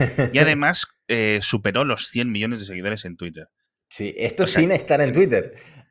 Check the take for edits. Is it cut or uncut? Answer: uncut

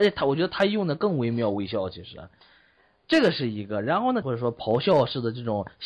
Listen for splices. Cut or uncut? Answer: cut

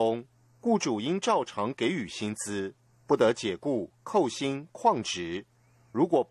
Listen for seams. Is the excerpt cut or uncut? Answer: uncut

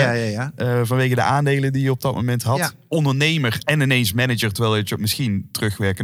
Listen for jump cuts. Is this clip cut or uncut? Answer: uncut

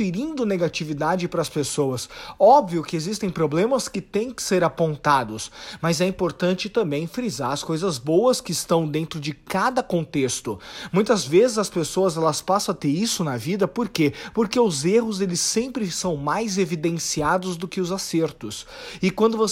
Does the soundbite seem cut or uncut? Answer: uncut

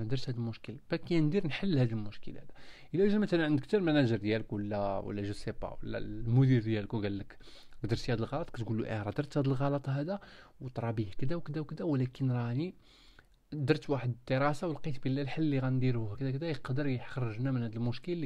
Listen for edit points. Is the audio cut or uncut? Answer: cut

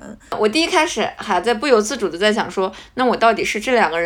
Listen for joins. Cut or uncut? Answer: uncut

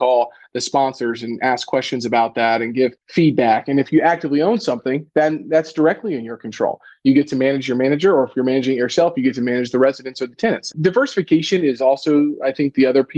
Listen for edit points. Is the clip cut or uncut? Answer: cut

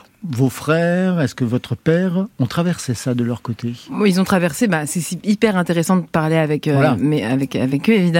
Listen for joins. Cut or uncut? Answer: uncut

